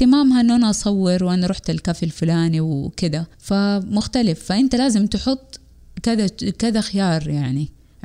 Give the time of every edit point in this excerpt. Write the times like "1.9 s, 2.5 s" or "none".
3.3 s